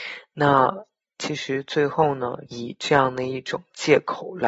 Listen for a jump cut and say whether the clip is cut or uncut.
cut